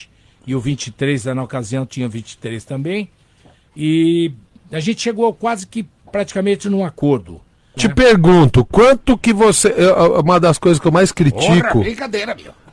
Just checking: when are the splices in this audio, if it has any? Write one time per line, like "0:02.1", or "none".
0:07.8